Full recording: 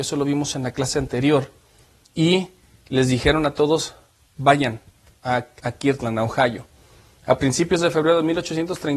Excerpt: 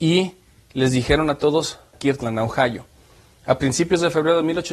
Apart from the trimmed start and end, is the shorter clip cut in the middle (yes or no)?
yes